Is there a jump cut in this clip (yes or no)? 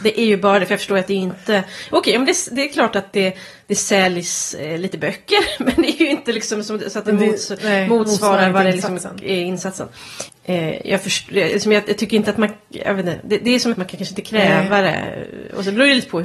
yes